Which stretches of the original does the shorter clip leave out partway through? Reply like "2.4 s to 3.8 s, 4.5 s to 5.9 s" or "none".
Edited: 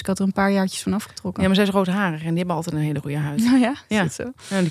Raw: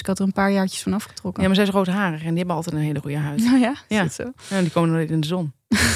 none